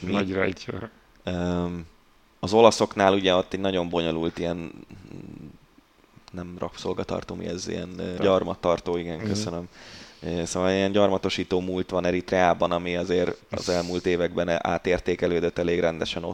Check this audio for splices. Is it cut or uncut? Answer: cut